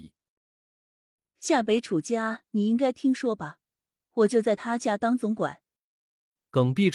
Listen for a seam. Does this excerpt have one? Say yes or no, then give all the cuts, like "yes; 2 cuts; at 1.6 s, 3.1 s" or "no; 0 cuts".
no; 0 cuts